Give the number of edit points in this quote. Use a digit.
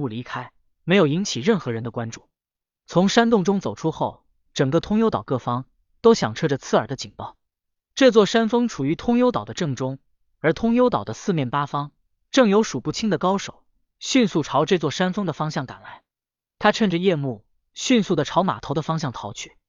0